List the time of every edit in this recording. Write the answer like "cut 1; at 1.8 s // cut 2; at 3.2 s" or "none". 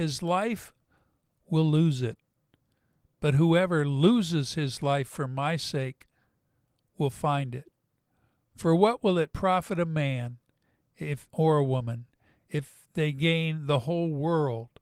none